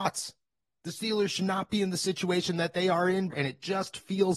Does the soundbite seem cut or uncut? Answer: cut